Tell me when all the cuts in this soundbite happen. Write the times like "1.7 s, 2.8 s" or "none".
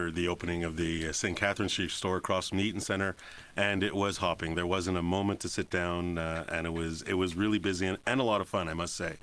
none